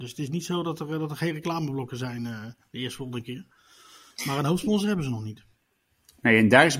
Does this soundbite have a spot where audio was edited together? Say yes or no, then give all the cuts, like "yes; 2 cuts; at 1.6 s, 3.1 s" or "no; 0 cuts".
no; 0 cuts